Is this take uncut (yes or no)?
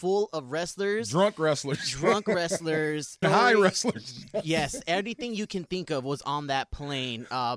no